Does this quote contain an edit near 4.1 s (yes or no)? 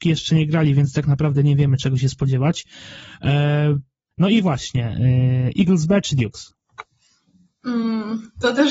yes